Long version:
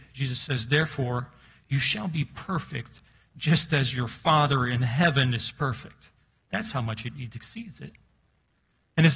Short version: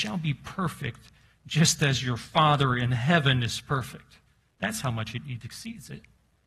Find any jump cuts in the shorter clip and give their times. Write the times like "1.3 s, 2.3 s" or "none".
none